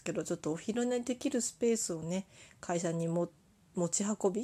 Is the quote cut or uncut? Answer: uncut